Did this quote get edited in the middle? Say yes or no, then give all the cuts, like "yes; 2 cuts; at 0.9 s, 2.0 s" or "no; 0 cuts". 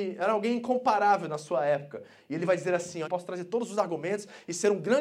yes; 1 cut; at 3.0 s